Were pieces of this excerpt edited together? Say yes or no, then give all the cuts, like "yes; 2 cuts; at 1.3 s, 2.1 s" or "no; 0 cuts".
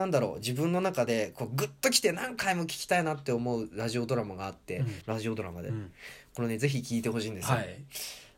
yes; 1 cut; at 5.0 s